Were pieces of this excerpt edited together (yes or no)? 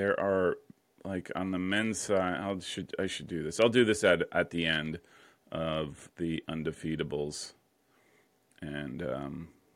no